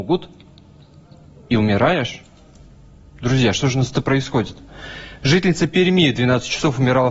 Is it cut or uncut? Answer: uncut